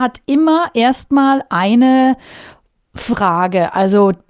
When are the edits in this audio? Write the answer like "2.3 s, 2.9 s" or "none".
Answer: none